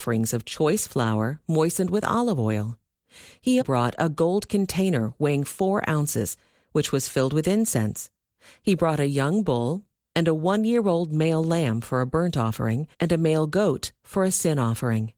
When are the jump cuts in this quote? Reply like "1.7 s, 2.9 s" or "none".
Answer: 3.6 s, 10.0 s, 12.9 s